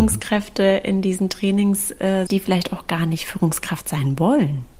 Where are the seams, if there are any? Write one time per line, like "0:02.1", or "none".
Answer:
0:02.3